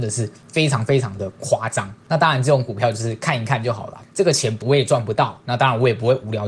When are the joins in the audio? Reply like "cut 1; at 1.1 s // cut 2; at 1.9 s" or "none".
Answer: none